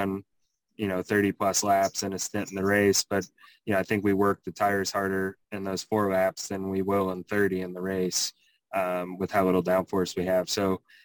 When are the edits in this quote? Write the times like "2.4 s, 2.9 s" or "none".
none